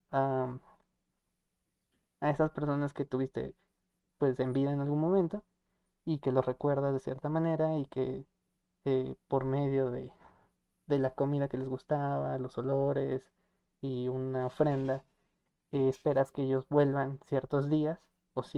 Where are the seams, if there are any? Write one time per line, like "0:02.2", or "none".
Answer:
none